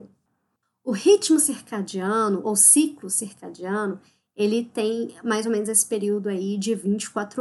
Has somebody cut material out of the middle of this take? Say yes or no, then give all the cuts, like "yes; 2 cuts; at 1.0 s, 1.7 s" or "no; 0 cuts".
no; 0 cuts